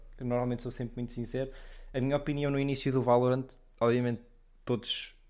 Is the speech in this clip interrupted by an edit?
no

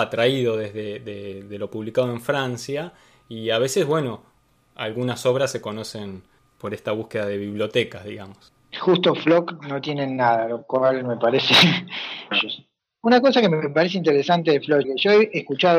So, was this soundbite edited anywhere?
yes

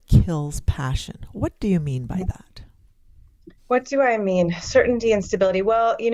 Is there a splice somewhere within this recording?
yes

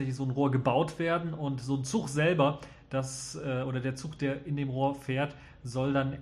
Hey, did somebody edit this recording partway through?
no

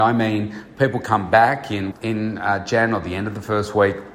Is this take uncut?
no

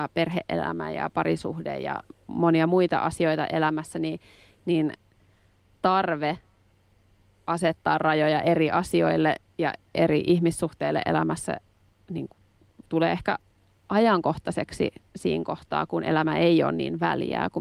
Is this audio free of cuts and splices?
yes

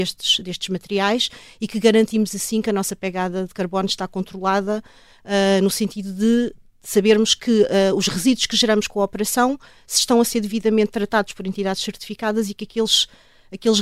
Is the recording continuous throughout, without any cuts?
yes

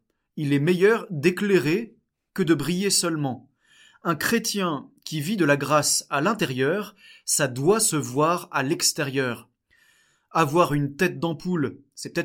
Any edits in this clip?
no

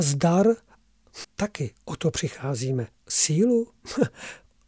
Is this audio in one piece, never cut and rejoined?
no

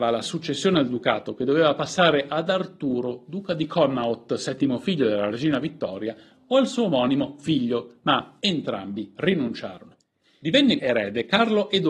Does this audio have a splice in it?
yes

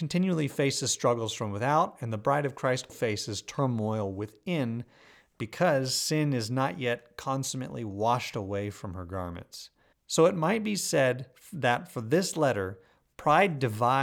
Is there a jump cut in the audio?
yes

